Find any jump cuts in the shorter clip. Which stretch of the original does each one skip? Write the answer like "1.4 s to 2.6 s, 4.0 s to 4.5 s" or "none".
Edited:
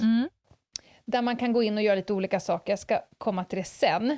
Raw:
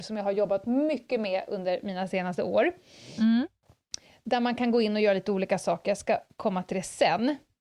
none